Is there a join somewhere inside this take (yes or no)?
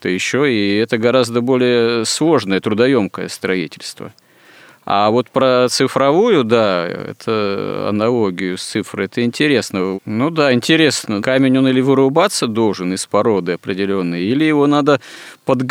yes